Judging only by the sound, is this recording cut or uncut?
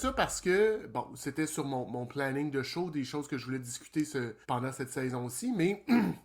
cut